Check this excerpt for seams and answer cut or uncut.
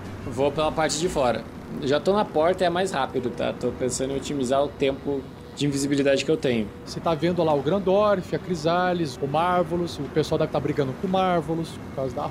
cut